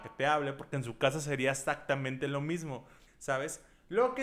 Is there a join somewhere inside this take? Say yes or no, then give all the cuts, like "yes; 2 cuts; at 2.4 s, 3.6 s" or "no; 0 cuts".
yes; 1 cut; at 3.1 s